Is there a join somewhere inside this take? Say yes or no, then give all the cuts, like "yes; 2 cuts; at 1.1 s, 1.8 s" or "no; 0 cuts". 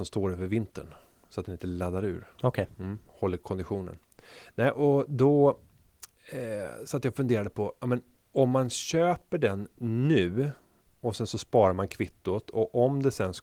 no; 0 cuts